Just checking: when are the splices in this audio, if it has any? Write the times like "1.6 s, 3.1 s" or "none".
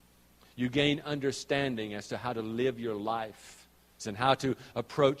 4.0 s